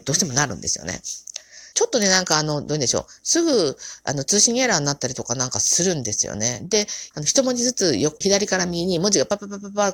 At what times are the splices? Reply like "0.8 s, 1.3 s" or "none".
1.7 s, 7.1 s, 8.2 s